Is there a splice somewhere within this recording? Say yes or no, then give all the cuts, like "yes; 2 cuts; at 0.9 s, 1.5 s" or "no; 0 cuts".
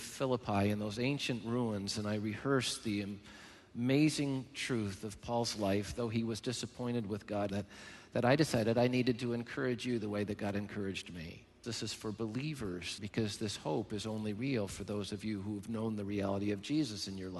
yes; 3 cuts; at 7.5 s, 11.6 s, 13.0 s